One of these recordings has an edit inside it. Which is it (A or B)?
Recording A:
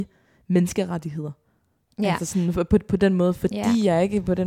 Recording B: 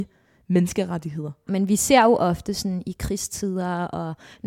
B